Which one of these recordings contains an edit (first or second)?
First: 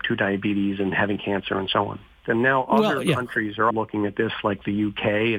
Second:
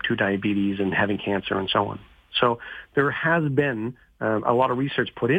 first